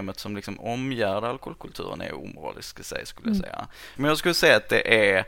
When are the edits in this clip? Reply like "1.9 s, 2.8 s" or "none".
4.0 s